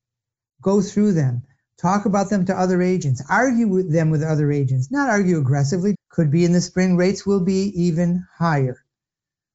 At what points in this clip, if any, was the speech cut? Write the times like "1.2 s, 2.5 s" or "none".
5.9 s